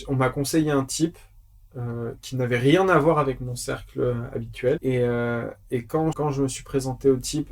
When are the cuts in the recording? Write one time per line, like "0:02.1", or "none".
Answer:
0:04.8
0:06.1